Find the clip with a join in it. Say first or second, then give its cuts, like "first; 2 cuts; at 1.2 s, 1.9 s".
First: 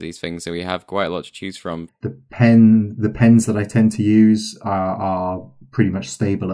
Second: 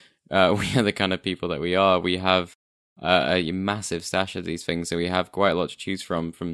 first; 1 cut; at 1.9 s